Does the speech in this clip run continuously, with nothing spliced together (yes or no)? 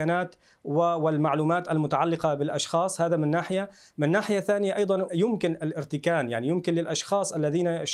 no